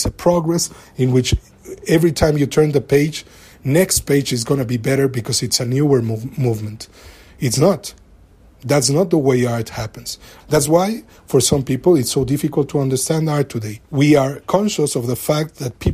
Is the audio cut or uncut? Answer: cut